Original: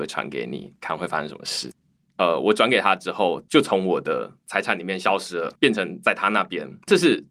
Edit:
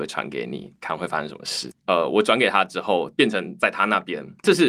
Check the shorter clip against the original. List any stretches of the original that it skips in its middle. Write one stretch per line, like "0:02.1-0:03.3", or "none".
0:01.8-0:02.1
0:03.4-0:05.6